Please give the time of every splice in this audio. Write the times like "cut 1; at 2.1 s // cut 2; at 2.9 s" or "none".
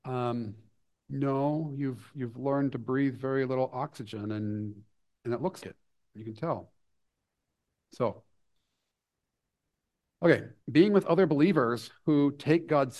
cut 1; at 5.6 s // cut 2; at 10.6 s